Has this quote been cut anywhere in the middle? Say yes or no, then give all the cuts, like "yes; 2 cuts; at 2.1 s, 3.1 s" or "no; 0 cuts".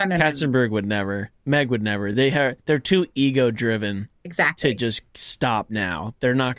no; 0 cuts